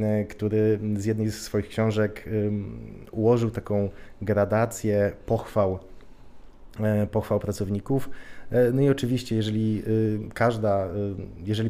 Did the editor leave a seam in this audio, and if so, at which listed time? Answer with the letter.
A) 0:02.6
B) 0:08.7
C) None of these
C